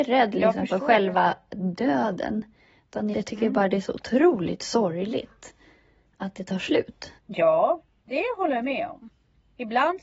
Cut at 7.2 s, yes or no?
yes